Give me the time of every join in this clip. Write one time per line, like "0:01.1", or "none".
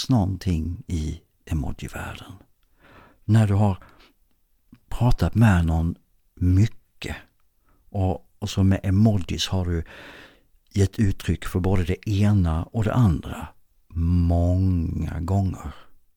none